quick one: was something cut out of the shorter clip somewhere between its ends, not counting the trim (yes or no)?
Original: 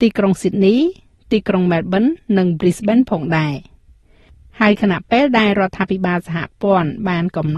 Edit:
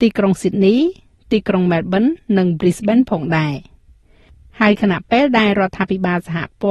no